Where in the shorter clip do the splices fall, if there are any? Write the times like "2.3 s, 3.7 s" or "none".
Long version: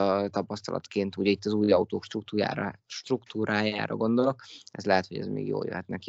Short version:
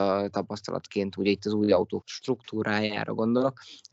2.0 s